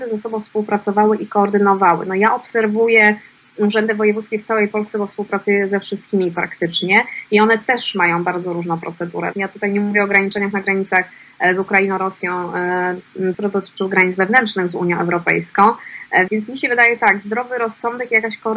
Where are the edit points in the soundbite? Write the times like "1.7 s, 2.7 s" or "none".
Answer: 9.3 s, 13.3 s, 16.3 s

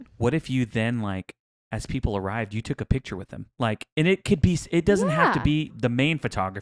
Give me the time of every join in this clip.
3.5 s, 5.7 s

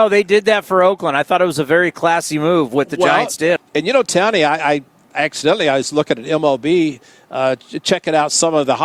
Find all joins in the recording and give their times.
3.6 s

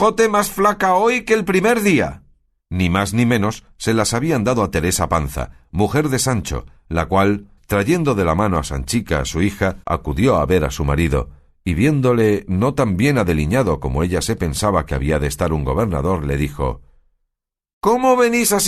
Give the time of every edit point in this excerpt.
2.6 s, 7.6 s, 9.8 s

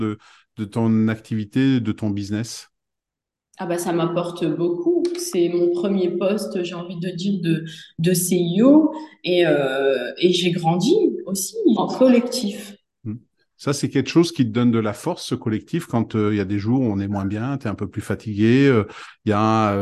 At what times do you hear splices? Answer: 11.8 s

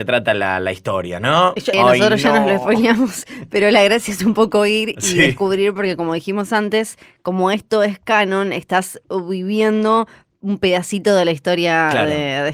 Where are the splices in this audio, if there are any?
1.7 s

